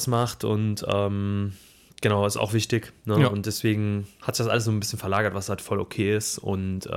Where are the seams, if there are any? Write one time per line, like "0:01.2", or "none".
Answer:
none

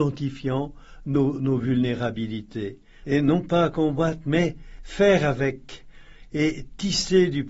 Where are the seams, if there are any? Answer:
0:03.0

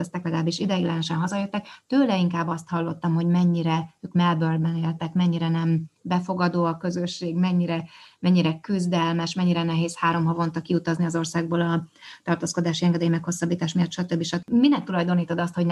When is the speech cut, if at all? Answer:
0:14.4

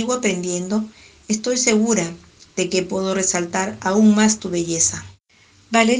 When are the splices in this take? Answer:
none

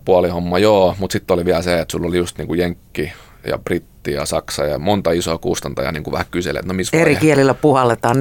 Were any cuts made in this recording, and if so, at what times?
none

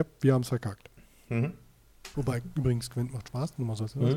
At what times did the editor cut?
0:02.1

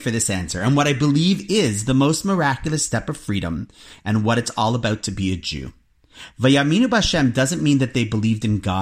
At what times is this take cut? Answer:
none

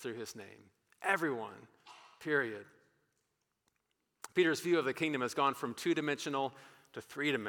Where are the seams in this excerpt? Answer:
none

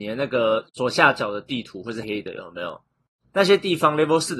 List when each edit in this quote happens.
0:02.0

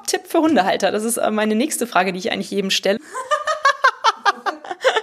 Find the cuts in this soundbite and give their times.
0:03.0

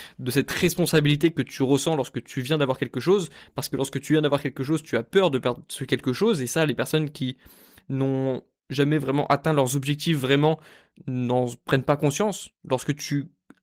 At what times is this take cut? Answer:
none

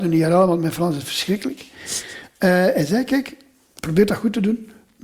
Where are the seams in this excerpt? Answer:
none

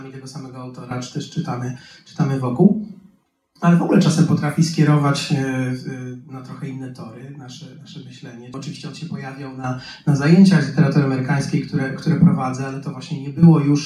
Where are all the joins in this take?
0:08.5

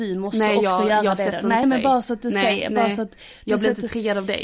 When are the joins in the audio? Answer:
0:01.6

